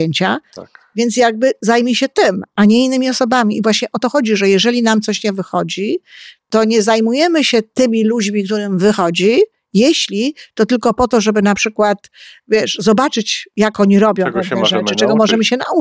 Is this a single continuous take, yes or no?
yes